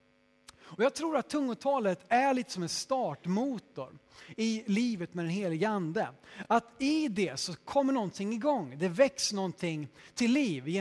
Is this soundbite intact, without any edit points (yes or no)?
yes